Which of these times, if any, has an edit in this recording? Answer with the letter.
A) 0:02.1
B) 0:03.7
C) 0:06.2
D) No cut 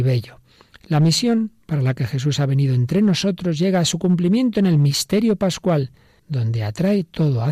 C